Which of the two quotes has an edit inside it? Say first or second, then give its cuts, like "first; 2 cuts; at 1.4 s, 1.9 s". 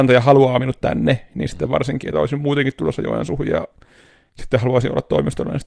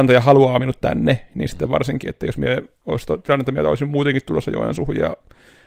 first; 1 cut; at 2.1 s